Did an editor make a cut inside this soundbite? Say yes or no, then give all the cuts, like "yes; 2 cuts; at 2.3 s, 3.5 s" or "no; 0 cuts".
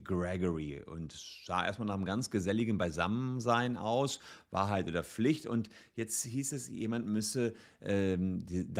no; 0 cuts